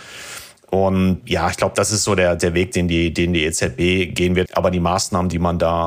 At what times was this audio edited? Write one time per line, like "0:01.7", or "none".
0:04.5